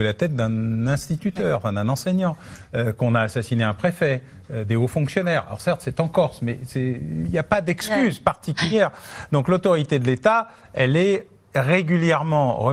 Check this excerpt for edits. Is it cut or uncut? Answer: uncut